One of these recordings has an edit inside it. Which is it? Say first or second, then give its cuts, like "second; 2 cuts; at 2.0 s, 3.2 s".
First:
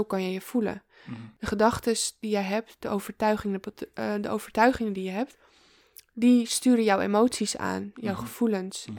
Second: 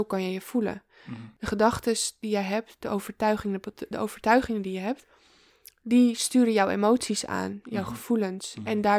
second; 1 cut; at 3.9 s